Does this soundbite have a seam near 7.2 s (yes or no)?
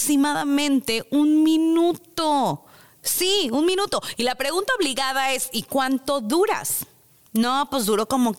no